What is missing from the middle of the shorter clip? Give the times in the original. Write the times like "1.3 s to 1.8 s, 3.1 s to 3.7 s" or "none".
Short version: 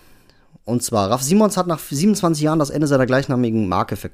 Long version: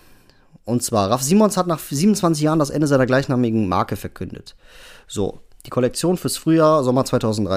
none